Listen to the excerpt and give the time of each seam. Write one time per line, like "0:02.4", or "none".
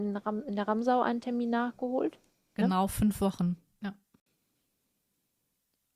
0:02.6
0:03.8